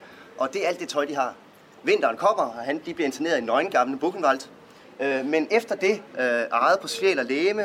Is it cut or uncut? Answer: cut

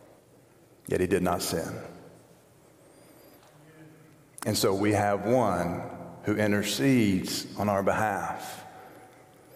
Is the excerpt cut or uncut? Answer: uncut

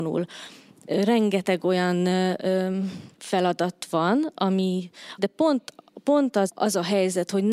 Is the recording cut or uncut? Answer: cut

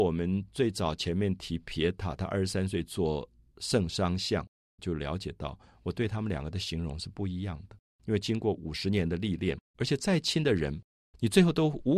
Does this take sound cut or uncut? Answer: cut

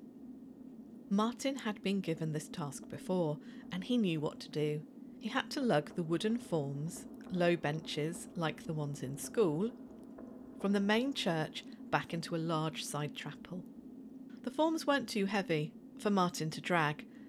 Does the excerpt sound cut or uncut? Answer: uncut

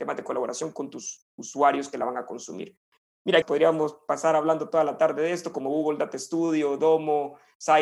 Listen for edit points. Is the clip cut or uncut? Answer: cut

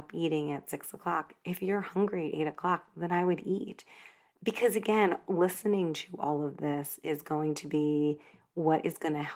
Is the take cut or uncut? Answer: uncut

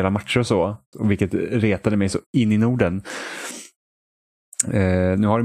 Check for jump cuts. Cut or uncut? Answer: cut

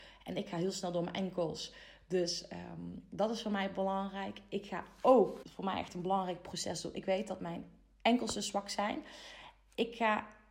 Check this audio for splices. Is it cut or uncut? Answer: cut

